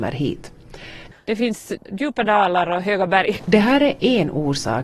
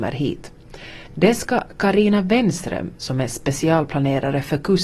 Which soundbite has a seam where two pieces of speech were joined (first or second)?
first